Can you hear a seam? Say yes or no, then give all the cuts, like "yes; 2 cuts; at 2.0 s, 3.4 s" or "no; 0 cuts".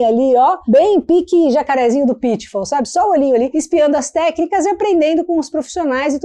no; 0 cuts